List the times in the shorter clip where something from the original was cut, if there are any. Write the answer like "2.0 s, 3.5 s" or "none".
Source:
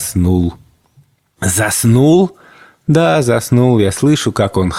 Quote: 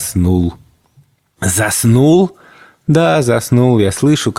none